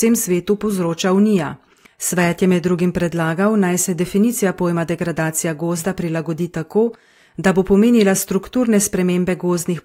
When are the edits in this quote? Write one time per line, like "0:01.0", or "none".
0:01.9